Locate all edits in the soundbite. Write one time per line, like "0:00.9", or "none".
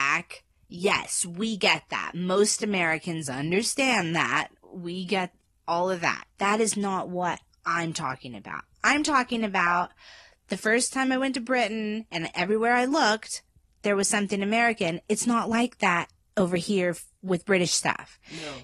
0:06.3